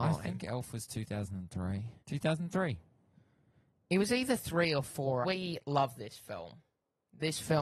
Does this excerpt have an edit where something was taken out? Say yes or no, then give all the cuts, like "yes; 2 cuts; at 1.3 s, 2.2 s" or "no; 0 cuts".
yes; 2 cuts; at 2.0 s, 5.2 s